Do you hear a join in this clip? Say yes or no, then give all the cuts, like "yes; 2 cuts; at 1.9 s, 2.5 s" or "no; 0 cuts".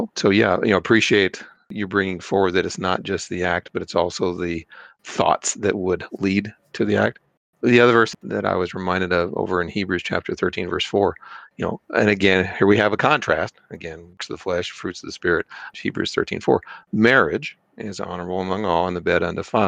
yes; 1 cut; at 15.7 s